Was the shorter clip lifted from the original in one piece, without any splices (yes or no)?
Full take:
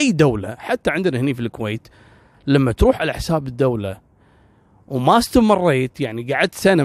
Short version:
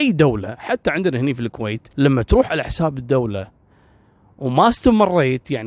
no